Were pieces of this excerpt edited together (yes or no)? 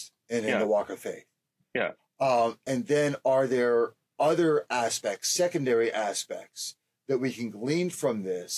no